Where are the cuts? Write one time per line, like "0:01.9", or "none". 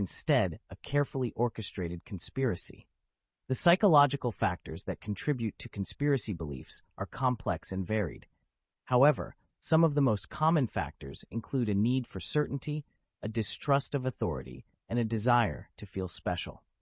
0:03.4